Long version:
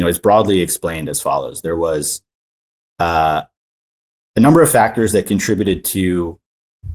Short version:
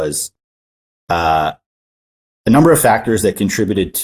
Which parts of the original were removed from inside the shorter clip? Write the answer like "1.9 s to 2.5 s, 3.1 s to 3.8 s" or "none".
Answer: none